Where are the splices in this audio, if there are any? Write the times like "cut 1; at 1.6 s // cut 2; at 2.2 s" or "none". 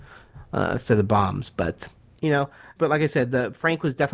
cut 1; at 2.8 s